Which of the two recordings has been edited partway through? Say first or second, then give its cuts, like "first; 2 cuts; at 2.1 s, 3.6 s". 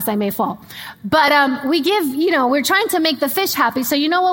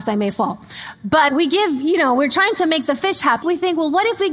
second; 2 cuts; at 1.3 s, 3.4 s